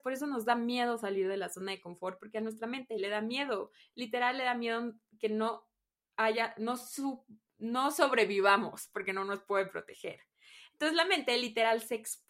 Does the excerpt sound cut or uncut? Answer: uncut